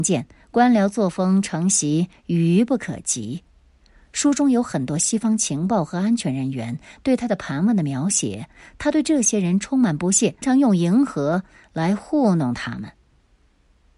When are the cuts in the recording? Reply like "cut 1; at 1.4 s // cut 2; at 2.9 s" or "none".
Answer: cut 1; at 10.4 s